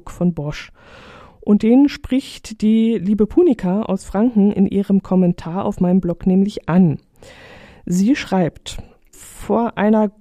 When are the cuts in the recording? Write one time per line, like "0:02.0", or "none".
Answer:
0:09.1